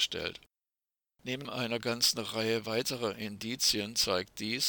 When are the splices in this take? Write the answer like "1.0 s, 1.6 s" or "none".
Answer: 1.2 s